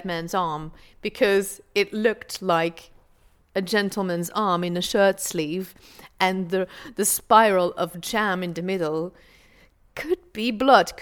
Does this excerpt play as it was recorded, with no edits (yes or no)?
yes